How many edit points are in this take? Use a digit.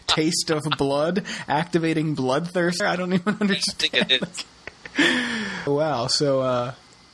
2